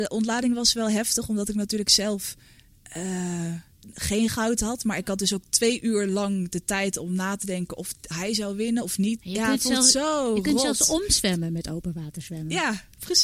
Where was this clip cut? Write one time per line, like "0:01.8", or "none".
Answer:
0:03.8
0:09.2